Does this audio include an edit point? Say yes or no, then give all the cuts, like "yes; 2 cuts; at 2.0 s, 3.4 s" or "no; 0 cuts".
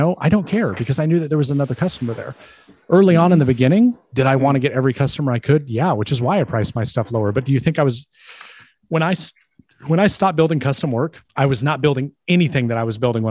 yes; 1 cut; at 11.3 s